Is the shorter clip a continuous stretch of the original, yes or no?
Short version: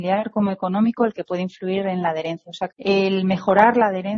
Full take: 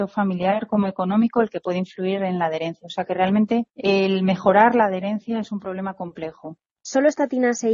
no